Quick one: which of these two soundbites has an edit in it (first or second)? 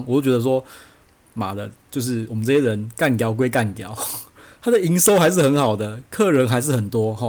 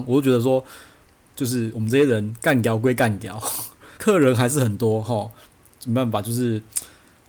second